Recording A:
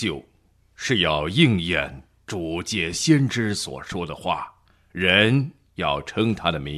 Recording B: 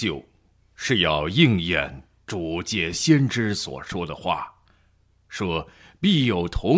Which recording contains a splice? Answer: A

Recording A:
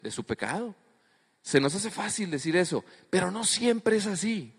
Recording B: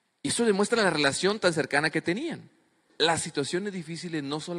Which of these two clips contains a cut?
B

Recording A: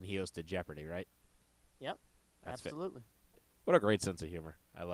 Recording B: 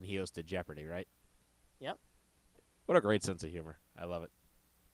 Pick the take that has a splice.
B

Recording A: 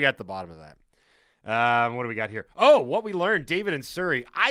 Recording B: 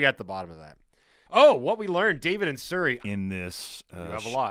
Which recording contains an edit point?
B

